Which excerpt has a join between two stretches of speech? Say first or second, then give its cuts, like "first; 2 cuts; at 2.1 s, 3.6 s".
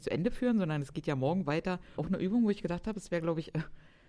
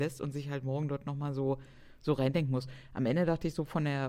first; 1 cut; at 2.0 s